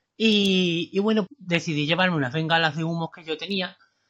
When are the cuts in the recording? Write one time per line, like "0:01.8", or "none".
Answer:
0:01.3

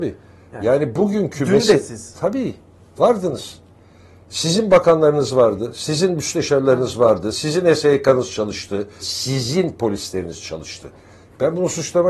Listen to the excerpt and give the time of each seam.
0:07.3
0:09.0

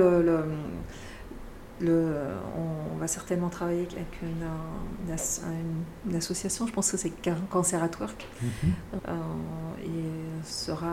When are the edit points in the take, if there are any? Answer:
0:09.0

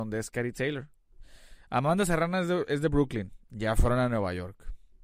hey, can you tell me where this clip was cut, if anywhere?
none

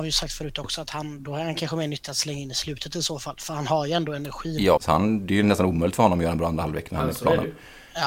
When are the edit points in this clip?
0:04.8

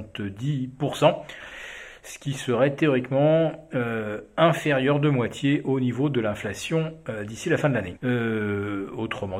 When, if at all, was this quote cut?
0:08.0

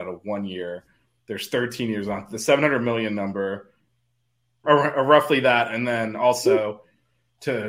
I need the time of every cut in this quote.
0:04.6

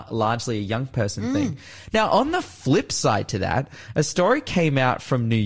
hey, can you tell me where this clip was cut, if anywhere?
none

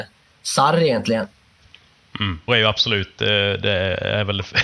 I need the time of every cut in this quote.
0:02.5

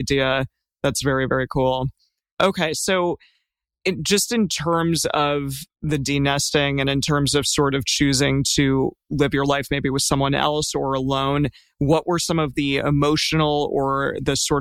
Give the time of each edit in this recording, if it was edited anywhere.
none

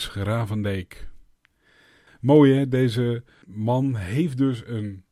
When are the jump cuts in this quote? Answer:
0:02.1
0:03.4

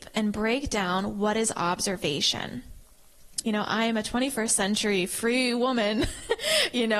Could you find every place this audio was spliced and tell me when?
0:03.4

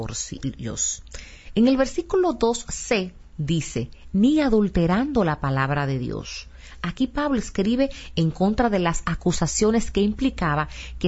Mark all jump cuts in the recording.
none

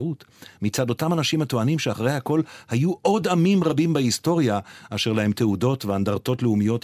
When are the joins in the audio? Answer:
none

